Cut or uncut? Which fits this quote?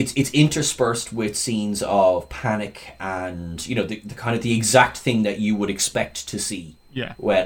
uncut